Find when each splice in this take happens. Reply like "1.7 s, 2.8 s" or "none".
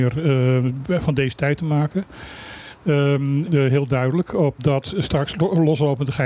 3.5 s, 4.6 s